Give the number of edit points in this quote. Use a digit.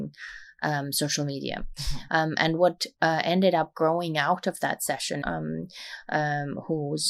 2